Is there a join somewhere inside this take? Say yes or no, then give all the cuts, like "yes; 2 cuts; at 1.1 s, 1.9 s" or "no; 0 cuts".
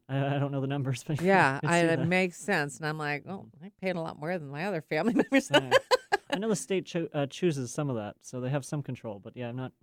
yes; 1 cut; at 1.2 s